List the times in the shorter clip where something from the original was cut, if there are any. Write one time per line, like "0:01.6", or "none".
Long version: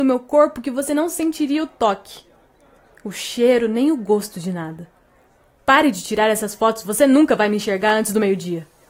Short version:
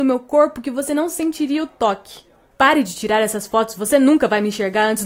0:02.5